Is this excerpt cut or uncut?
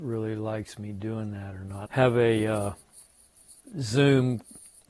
cut